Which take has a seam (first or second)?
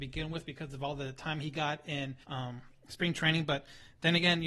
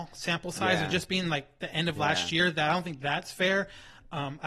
first